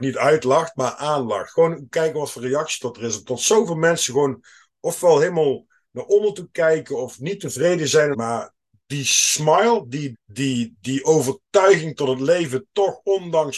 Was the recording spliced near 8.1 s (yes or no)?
yes